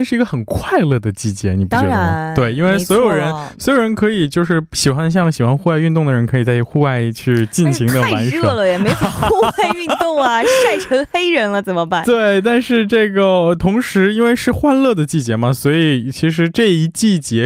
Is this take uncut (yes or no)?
yes